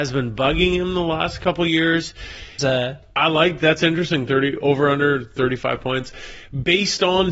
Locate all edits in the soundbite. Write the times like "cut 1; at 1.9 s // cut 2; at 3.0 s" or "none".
cut 1; at 2.6 s

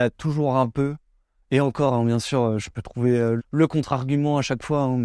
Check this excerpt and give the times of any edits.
cut 1; at 3.4 s

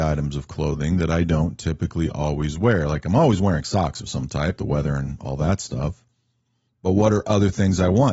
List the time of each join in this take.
cut 1; at 4.6 s

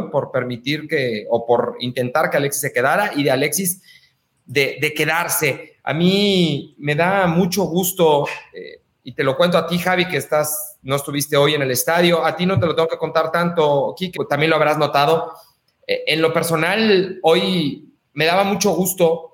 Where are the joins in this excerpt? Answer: cut 1; at 14.1 s

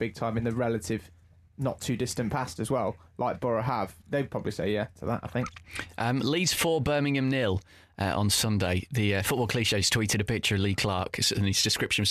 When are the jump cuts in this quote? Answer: none

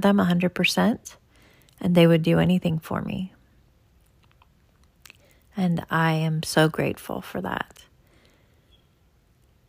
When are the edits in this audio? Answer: none

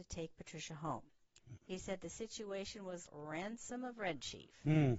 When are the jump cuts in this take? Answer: cut 1; at 1.6 s // cut 2; at 3.1 s

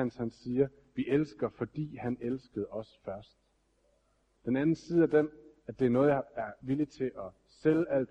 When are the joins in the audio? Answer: cut 1; at 4.4 s

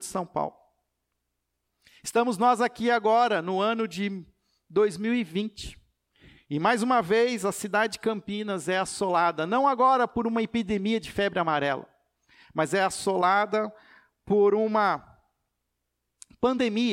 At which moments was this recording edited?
none

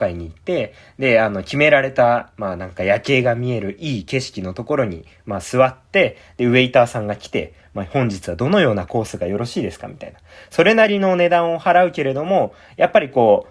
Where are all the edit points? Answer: none

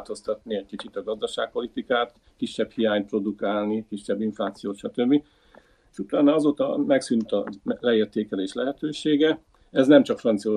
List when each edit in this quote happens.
none

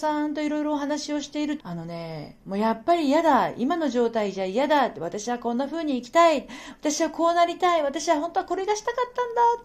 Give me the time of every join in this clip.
cut 1; at 1.6 s

